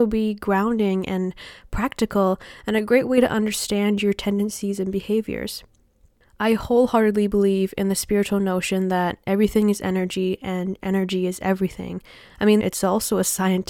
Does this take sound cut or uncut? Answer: cut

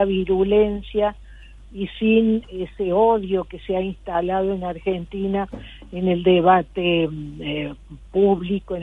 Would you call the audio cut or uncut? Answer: cut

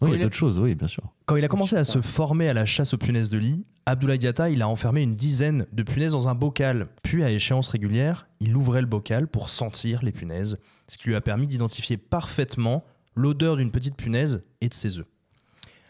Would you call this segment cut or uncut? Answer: cut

